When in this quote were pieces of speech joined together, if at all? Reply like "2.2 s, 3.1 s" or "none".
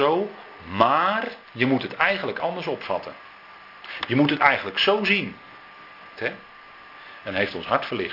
6.2 s, 7.2 s